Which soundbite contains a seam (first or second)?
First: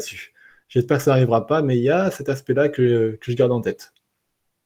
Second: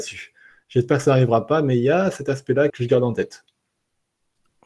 second